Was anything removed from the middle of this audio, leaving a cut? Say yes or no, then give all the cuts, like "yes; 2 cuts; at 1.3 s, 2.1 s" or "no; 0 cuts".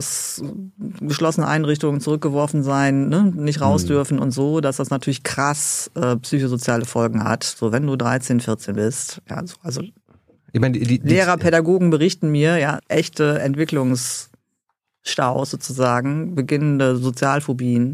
yes; 1 cut; at 12.8 s